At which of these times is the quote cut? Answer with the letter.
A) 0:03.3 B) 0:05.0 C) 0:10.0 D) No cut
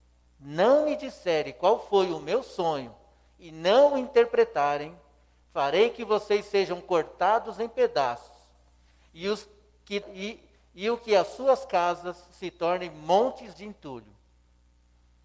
C